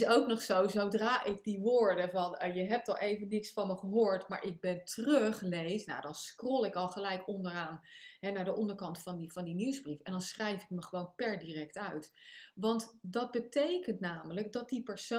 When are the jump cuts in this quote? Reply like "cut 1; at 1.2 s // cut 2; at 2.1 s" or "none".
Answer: none